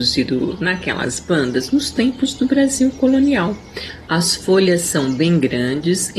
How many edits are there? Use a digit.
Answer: 1